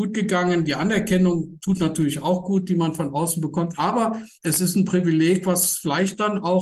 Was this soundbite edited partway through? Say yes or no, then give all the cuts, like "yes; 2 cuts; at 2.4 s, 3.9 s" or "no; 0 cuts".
yes; 1 cut; at 4.4 s